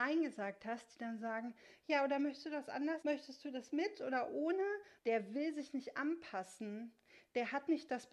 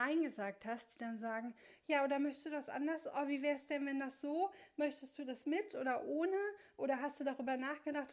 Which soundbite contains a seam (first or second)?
first